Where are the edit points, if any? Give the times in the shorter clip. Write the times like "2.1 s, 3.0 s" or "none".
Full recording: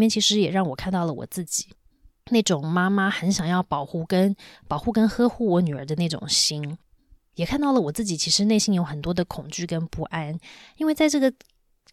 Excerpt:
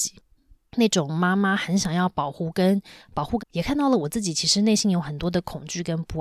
3.4 s